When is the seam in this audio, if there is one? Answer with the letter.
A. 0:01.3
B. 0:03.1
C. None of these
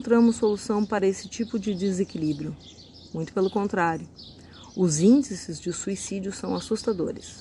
C